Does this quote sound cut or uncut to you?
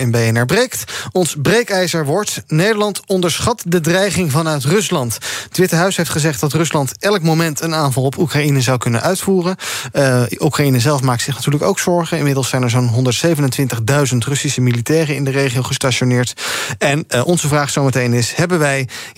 uncut